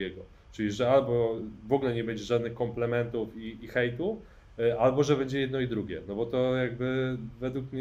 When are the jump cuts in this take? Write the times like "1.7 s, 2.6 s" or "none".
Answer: none